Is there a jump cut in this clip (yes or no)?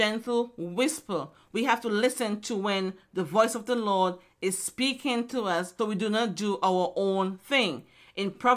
yes